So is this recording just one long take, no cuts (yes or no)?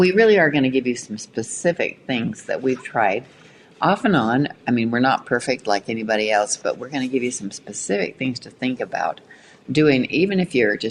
yes